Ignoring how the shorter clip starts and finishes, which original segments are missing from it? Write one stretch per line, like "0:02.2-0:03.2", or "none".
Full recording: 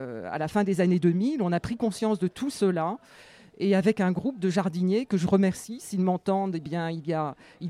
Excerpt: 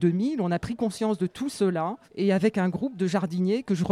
0:03.1-0:03.5

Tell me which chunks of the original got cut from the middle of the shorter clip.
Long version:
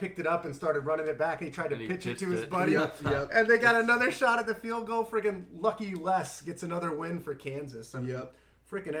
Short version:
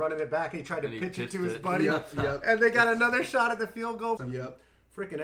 0:05.0-0:07.9

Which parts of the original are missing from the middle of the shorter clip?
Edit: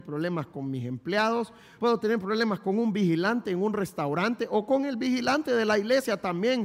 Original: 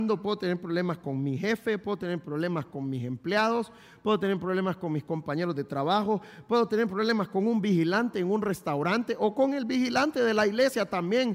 0:04.0-0:06.5

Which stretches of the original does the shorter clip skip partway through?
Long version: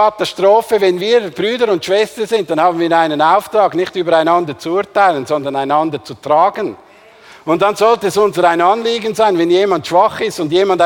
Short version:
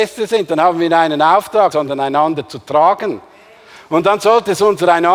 0:03.7-0:05.3

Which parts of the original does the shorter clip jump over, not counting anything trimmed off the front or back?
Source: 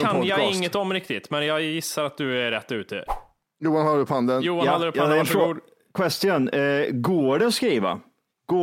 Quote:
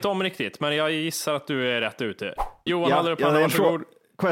0:03.4-0:04.4

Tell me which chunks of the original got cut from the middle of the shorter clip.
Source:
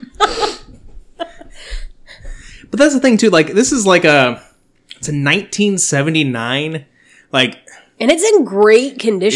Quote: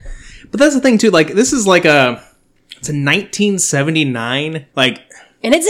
0:06.9-0:07.3

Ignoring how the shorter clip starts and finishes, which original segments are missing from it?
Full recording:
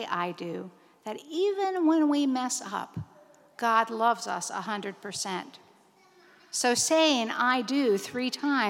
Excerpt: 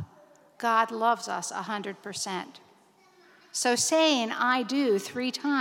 none

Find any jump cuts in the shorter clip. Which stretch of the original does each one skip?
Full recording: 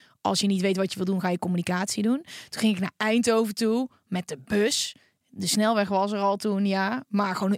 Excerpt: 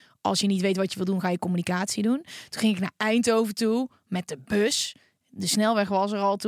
none

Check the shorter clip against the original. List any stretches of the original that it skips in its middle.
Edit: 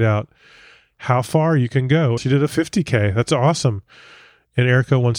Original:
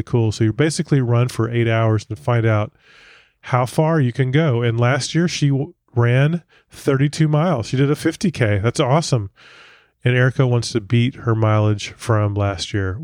0:04.6-0:07.6

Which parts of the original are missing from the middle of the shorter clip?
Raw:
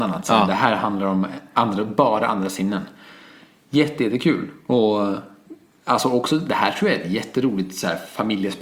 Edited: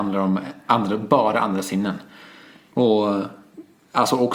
0:03.6-0:04.6

